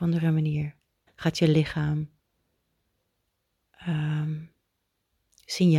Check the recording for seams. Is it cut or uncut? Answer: cut